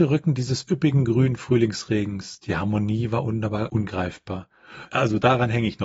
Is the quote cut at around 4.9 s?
yes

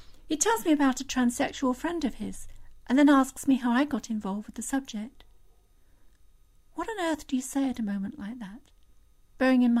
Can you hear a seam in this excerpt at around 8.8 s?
no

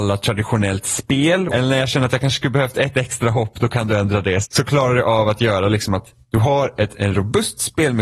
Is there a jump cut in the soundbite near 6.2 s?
yes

